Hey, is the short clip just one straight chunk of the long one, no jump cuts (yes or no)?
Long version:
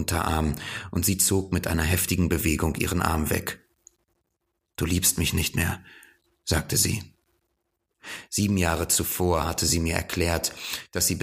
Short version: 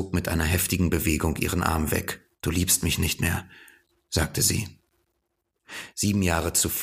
no